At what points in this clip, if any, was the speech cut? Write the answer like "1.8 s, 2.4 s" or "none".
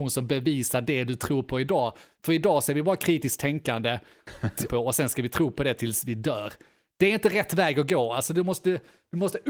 4.7 s